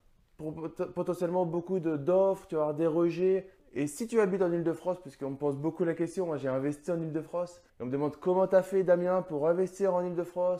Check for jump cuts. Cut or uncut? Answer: cut